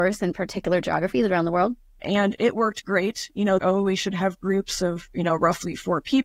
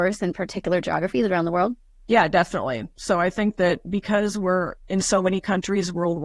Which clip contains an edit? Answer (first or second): first